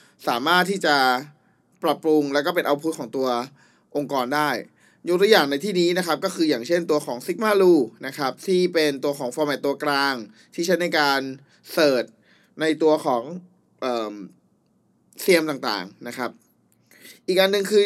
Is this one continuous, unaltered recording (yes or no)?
yes